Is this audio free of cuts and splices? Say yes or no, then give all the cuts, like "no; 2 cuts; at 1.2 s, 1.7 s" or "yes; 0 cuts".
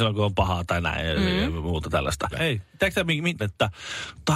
no; 2 cuts; at 2.3 s, 3.4 s